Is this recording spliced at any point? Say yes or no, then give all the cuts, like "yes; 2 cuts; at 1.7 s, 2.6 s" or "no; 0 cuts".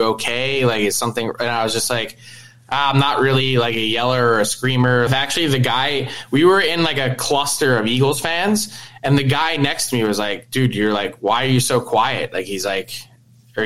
yes; 1 cut; at 5.1 s